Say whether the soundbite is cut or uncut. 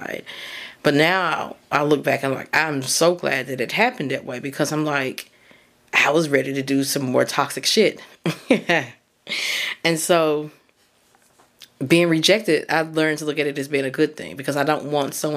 uncut